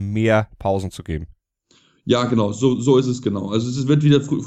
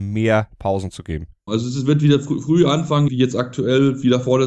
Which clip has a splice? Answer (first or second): second